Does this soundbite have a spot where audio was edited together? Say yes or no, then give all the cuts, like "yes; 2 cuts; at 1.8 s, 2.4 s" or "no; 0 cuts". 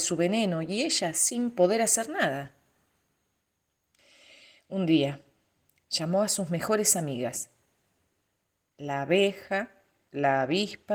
no; 0 cuts